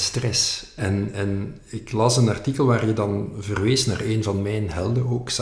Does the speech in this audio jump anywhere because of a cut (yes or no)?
no